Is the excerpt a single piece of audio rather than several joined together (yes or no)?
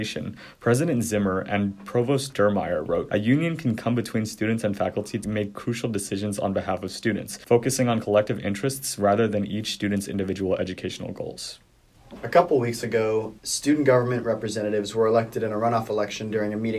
yes